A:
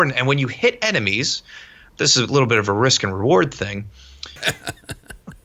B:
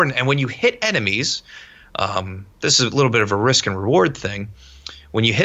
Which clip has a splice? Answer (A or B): A